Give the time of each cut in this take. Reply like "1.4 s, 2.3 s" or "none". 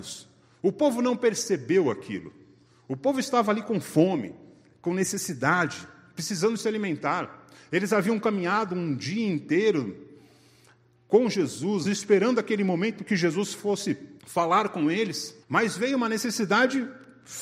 11.8 s, 14.2 s, 15.4 s

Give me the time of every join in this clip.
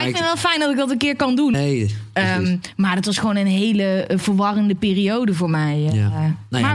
1.5 s

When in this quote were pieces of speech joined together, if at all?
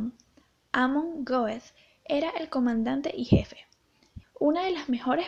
4.2 s

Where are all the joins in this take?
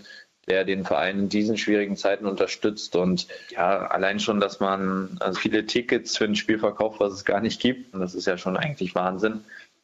5.3 s, 7.9 s

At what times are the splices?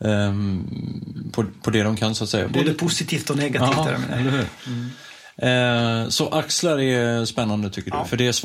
2.5 s

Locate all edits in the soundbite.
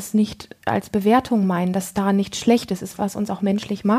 3.0 s

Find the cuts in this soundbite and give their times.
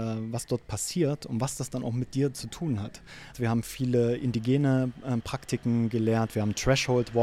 3.3 s

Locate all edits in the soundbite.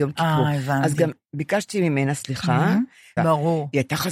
3.2 s

